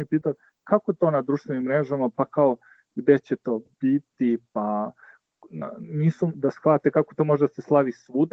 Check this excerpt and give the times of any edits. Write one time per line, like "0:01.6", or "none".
0:06.3